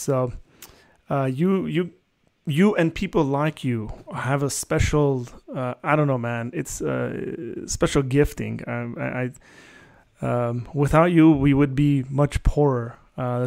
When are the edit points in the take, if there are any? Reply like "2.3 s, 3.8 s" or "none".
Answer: none